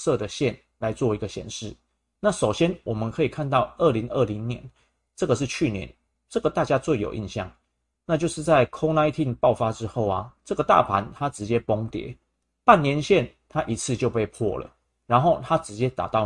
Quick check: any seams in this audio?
no; 0 cuts

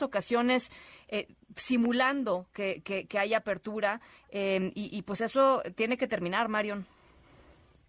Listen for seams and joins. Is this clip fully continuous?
yes; 0 cuts

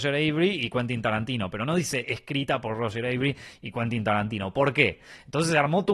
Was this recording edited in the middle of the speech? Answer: no; 0 cuts

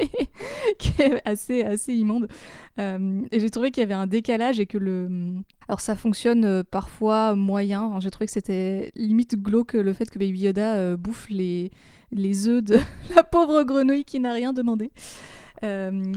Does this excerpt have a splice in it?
yes; 1 cut; at 5.6 s

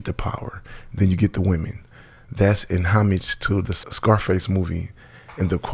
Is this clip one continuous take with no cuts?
yes; 0 cuts

